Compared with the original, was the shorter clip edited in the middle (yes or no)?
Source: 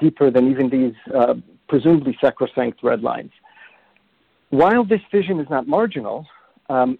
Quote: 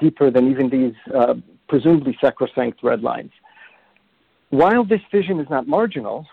no